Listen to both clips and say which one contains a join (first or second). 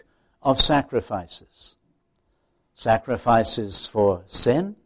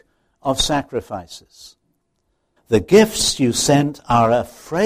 second